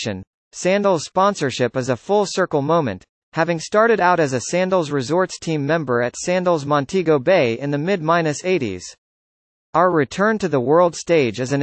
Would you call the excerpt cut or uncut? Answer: uncut